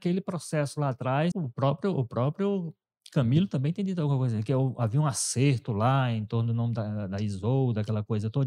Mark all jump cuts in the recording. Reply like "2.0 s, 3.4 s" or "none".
1.3 s